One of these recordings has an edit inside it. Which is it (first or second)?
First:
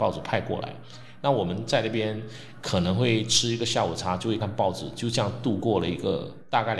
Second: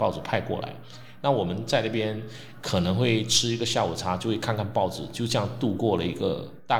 first